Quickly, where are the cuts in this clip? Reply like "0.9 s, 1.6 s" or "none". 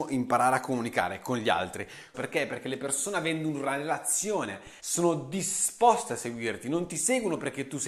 2.1 s, 4.8 s

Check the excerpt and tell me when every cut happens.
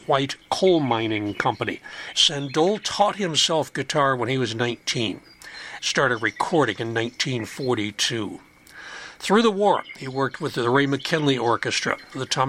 2.1 s, 5.8 s

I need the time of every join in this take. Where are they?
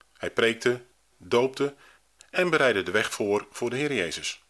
none

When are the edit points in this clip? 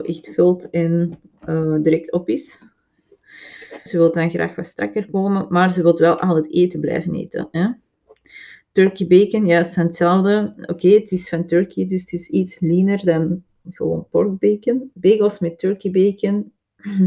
3.9 s, 13.6 s, 14.9 s

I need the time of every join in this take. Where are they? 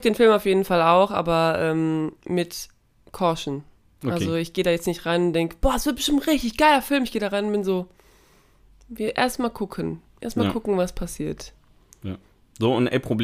none

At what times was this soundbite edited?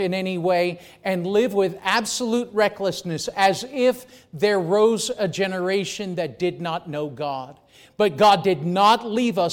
none

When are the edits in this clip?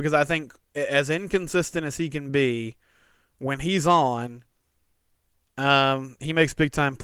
none

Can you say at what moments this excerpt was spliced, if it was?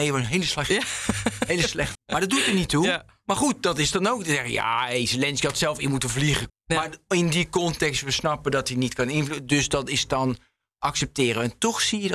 1.9 s, 6.5 s

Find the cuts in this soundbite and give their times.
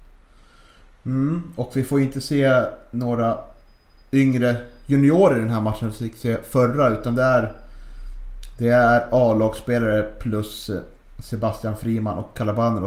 none

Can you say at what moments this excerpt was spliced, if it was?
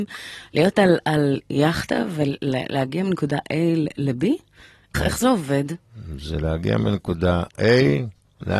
4.9 s

